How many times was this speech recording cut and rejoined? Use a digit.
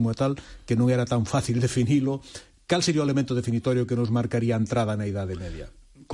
0